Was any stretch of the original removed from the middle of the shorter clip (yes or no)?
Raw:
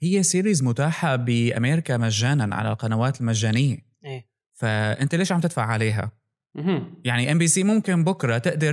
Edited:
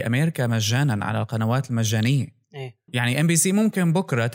yes